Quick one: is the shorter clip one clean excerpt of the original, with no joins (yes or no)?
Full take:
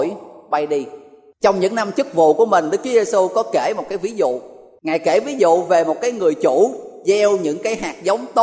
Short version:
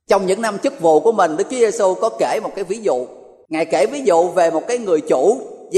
yes